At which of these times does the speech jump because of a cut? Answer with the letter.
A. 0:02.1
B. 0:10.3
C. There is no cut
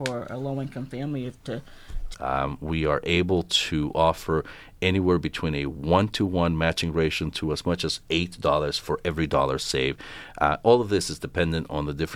A